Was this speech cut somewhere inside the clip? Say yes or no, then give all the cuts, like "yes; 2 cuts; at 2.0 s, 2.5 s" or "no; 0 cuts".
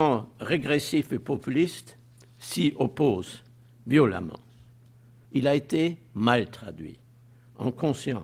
yes; 1 cut; at 5.2 s